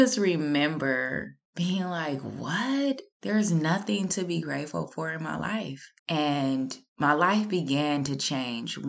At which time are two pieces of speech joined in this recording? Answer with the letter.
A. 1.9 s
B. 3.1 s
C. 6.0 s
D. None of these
C